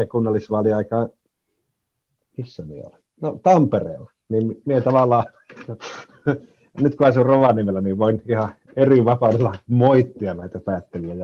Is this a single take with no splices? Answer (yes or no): yes